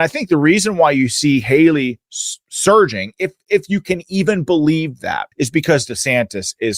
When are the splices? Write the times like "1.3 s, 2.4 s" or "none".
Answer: 5.3 s